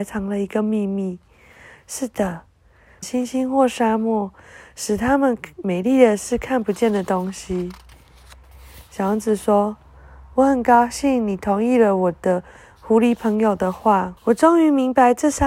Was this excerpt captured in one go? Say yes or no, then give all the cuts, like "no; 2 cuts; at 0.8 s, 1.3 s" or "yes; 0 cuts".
no; 2 cuts; at 3.0 s, 14.2 s